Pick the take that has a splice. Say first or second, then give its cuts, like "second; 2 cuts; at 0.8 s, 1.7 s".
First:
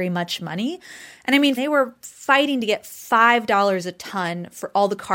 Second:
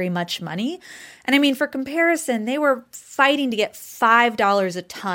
first; 1 cut; at 1.6 s